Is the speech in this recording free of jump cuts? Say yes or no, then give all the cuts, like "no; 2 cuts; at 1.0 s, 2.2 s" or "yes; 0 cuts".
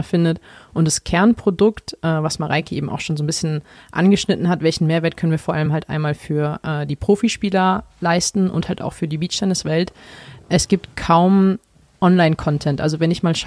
yes; 0 cuts